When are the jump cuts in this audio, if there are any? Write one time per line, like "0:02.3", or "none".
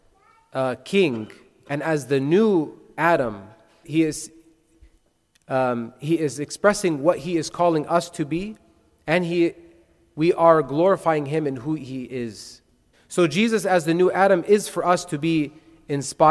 0:03.8
0:12.9